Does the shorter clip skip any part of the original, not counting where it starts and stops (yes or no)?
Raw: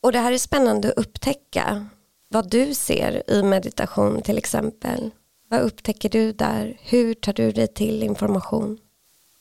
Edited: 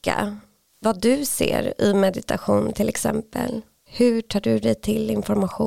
yes